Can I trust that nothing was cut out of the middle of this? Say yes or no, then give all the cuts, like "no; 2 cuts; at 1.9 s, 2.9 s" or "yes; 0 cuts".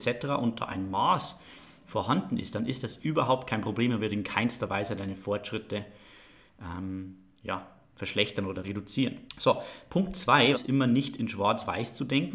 no; 2 cuts; at 9.3 s, 10.5 s